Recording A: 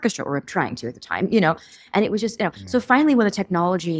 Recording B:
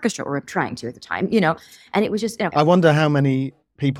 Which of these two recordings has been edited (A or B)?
B